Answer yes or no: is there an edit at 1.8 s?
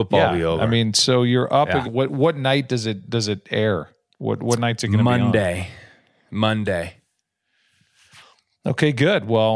yes